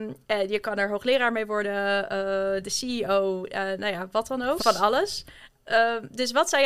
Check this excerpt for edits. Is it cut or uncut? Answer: cut